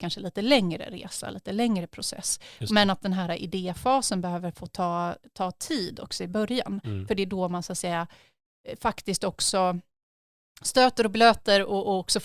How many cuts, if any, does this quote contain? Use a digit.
0